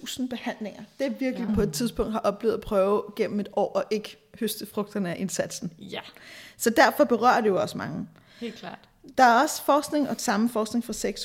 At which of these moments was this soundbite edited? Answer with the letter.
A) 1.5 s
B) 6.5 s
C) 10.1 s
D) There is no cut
A